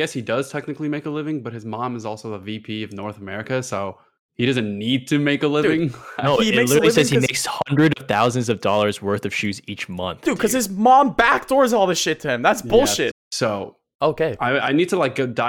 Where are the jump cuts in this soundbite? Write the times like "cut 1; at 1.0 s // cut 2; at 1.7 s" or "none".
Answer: cut 1; at 13.1 s